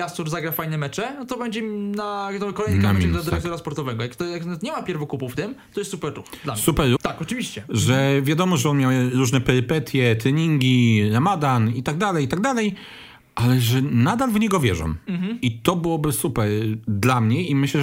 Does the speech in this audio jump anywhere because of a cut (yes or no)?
yes